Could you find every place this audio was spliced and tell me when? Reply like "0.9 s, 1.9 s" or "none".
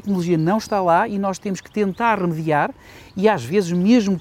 none